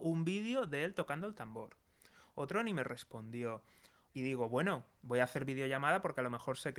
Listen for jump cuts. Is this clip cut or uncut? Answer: cut